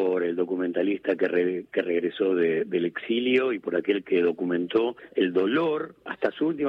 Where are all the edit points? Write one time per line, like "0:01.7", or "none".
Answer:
none

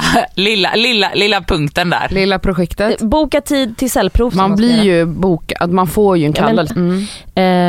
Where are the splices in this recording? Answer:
0:04.3
0:06.7

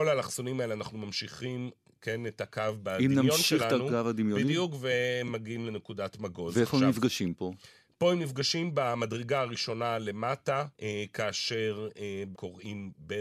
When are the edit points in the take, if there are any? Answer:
0:10.7
0:12.3

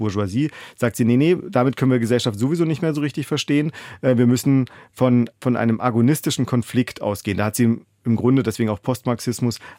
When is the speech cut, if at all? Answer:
0:05.3

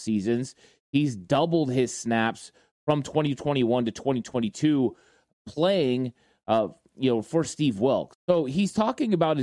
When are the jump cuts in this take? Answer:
0:08.1

